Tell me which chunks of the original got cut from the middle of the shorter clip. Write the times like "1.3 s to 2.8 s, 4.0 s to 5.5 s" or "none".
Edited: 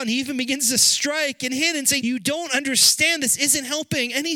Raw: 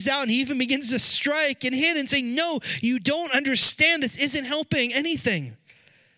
2.2 s to 2.8 s